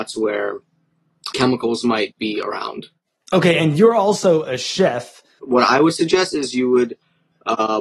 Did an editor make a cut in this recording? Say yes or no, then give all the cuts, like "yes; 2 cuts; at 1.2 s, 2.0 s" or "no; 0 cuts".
yes; 2 cuts; at 1.3 s, 5.4 s